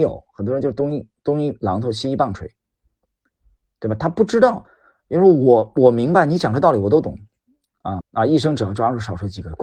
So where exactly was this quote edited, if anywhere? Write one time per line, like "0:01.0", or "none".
0:08.0